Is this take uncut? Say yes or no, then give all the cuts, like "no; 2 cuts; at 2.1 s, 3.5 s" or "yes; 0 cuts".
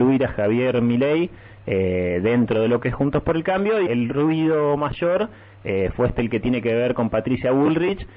no; 1 cut; at 3.9 s